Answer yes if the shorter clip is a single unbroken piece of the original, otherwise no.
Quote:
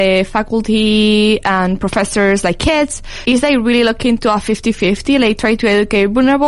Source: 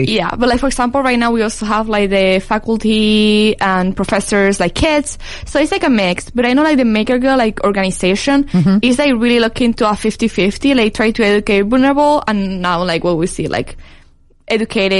no